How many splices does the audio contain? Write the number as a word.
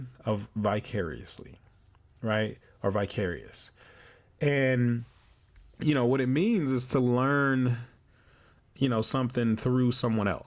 zero